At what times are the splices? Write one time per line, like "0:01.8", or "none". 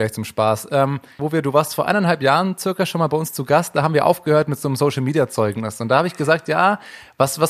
0:01.2